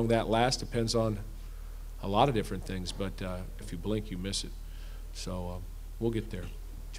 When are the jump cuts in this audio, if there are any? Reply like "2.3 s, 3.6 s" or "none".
3.6 s